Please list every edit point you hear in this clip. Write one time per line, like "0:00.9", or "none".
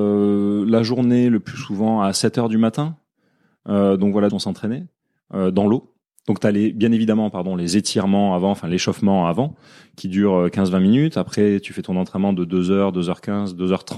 0:04.3